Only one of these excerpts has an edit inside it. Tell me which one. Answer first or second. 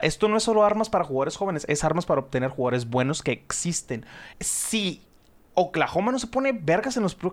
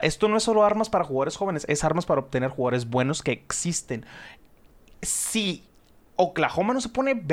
first